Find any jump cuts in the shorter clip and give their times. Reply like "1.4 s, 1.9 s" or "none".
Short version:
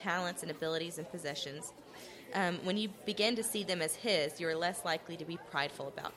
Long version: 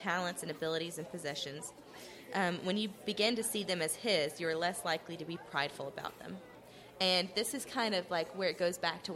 none